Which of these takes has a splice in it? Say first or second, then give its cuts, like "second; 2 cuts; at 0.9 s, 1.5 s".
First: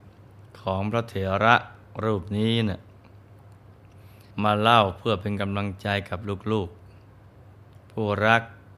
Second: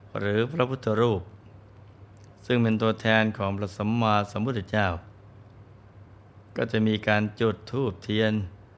first; 1 cut; at 4.3 s